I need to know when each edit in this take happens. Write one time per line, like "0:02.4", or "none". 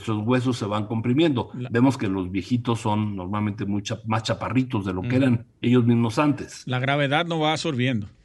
none